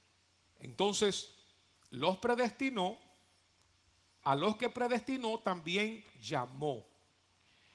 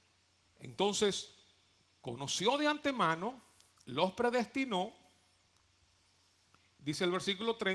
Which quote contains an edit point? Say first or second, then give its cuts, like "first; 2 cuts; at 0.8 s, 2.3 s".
first; 2 cuts; at 1.8 s, 4.2 s